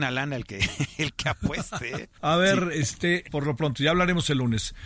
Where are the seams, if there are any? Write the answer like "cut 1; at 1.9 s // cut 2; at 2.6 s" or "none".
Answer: cut 1; at 2.2 s // cut 2; at 3.3 s